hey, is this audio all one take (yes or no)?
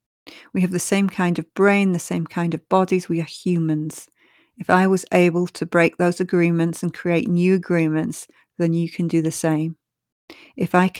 yes